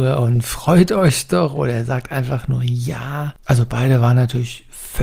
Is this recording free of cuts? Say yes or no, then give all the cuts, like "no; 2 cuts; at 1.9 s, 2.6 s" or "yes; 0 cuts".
no; 1 cut; at 3.4 s